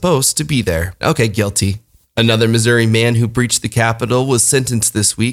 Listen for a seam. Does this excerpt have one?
yes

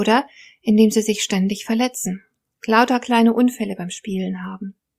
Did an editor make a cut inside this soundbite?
no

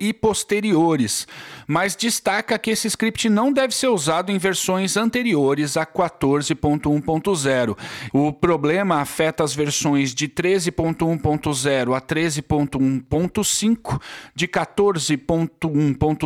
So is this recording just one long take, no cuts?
no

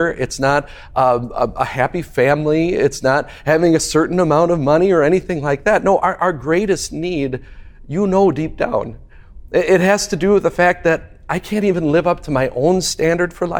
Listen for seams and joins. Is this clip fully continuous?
yes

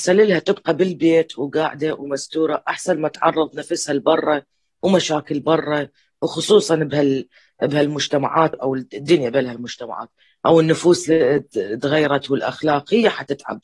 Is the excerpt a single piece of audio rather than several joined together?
no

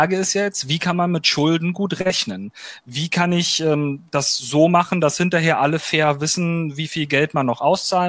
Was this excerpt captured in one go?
yes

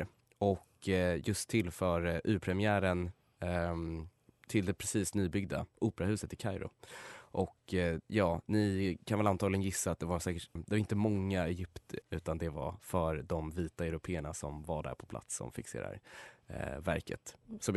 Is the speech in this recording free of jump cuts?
no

